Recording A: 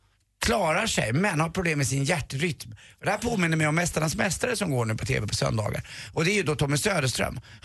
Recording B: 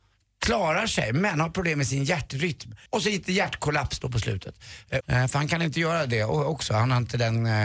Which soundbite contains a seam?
B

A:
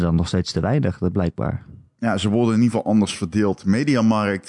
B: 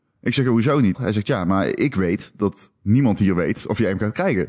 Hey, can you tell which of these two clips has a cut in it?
B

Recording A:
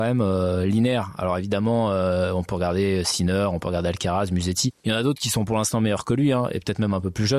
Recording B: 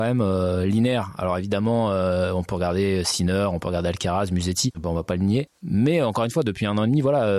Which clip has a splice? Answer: B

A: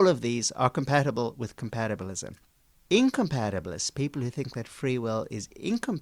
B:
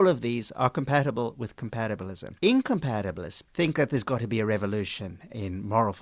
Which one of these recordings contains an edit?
B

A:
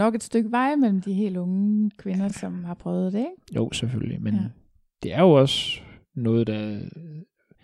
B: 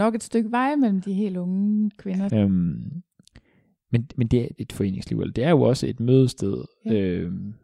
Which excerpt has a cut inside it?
B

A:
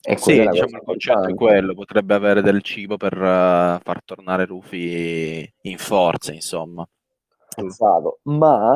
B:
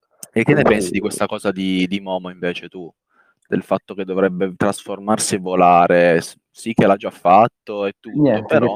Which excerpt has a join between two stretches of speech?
A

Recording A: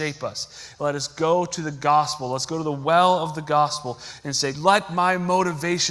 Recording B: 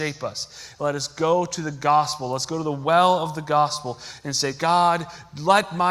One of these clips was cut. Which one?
A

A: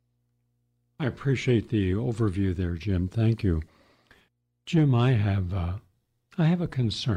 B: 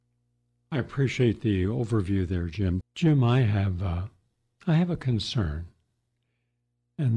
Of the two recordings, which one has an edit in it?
B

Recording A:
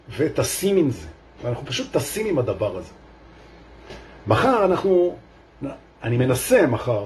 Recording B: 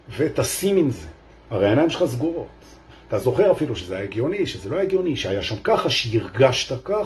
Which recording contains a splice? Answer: B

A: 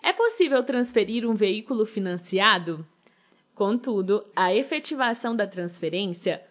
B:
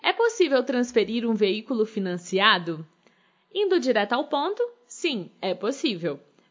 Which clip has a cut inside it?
A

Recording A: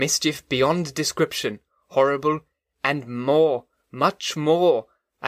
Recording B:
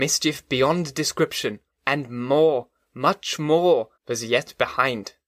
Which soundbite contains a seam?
B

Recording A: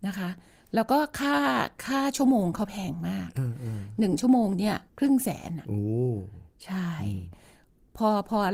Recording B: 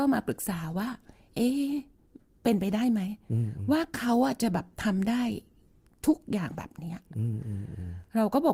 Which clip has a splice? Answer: A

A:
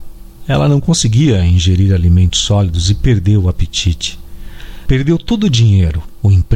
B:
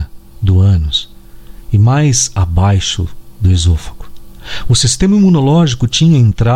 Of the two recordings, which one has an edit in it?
A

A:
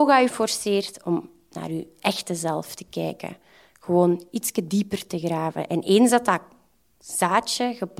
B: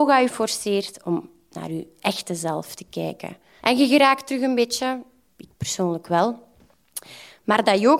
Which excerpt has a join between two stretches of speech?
B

